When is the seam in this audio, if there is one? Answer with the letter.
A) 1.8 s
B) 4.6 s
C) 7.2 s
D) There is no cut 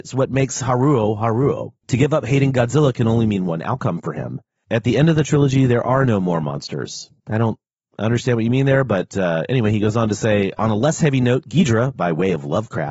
C